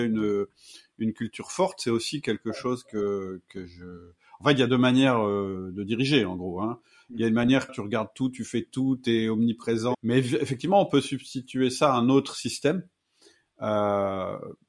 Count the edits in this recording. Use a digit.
2